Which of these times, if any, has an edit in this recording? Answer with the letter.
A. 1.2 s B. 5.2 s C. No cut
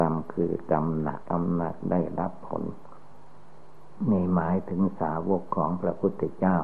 A